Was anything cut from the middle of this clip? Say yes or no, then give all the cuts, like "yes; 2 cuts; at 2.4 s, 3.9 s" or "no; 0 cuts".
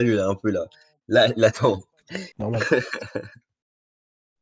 yes; 1 cut; at 2.3 s